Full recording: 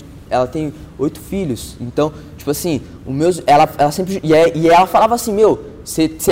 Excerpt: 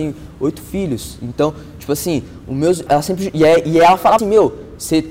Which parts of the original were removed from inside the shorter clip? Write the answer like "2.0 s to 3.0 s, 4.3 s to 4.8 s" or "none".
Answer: 3.4 s to 3.8 s, 5.1 s to 5.2 s